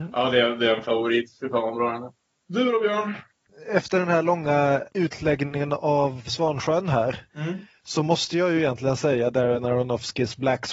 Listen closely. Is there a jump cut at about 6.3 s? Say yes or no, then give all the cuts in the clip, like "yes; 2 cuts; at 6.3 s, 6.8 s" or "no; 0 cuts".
yes; 1 cut; at 6.3 s